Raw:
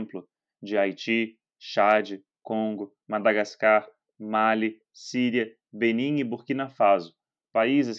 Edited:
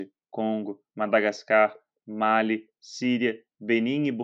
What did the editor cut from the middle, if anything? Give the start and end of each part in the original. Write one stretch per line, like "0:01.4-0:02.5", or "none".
none